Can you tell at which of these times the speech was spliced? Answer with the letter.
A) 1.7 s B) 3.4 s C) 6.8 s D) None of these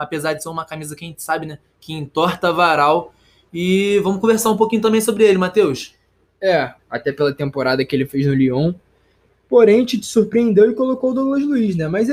C